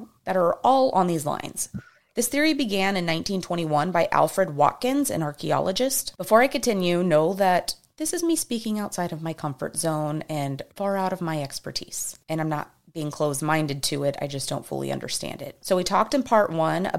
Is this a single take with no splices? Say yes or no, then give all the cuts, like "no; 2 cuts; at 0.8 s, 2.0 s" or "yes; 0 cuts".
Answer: no; 1 cut; at 15.6 s